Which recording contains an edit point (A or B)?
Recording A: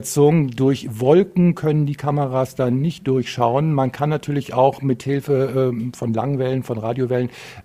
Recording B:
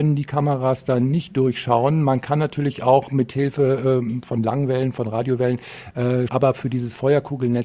B